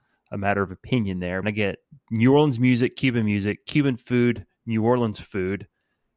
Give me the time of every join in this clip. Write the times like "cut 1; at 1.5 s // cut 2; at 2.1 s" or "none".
cut 1; at 1.4 s